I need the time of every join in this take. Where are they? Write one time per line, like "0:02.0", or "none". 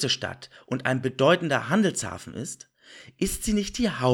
none